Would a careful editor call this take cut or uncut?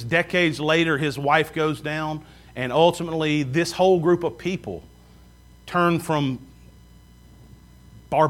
uncut